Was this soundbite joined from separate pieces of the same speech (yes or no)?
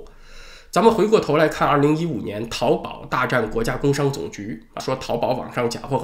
yes